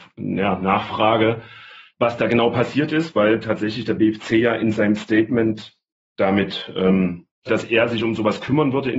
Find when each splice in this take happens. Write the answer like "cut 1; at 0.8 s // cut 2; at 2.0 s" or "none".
cut 1; at 7.5 s